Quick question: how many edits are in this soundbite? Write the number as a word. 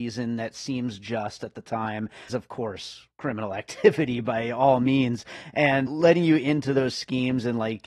two